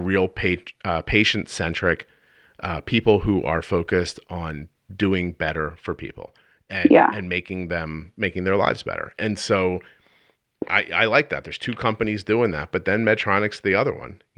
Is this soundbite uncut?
yes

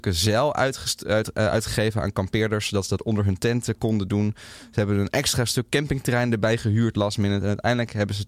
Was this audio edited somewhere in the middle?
no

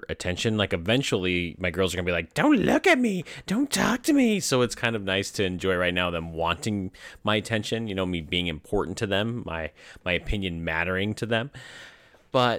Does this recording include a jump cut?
no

